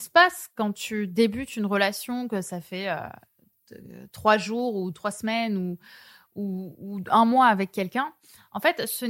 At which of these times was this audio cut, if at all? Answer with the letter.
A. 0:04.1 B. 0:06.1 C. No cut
C